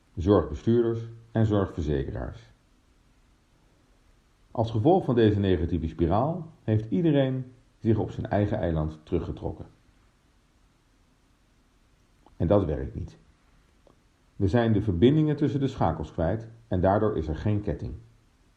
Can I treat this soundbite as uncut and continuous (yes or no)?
no